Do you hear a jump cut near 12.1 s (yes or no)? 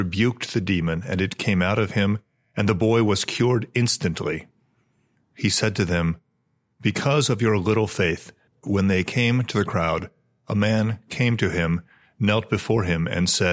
no